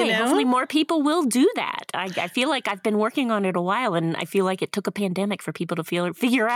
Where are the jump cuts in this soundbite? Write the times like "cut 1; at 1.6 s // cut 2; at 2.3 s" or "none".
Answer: none